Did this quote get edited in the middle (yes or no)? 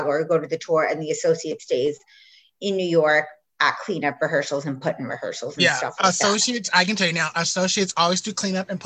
no